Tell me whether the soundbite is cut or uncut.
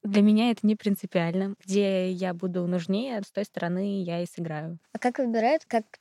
cut